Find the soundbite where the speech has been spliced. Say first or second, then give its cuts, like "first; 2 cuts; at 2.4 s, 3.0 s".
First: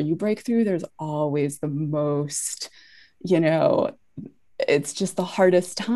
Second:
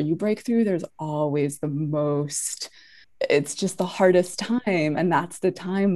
second; 1 cut; at 3.0 s